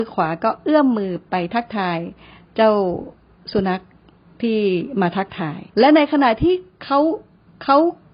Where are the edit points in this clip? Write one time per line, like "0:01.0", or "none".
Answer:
0:05.7